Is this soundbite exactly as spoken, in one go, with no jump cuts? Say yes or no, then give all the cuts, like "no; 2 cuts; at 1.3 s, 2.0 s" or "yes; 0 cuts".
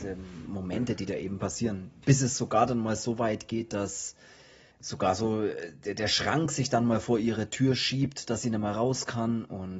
yes; 0 cuts